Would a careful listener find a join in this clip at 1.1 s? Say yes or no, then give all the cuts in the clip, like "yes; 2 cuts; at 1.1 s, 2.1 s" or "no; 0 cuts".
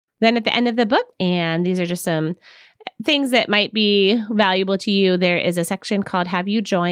yes; 1 cut; at 1.1 s